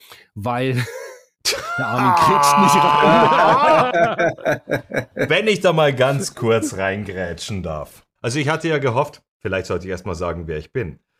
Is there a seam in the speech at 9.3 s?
yes; 2 cuts; at 8.2 s, 9.3 s

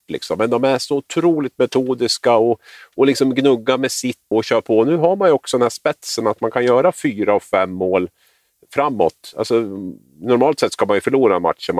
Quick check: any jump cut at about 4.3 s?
yes; 1 cut; at 4.3 s

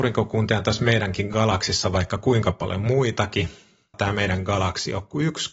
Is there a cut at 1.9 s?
no; 1 cut; at 3.9 s

